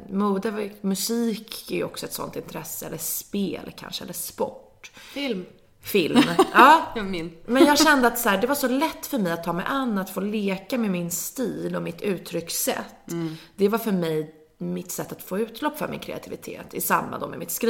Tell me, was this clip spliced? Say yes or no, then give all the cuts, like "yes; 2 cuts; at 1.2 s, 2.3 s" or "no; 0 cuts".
no; 0 cuts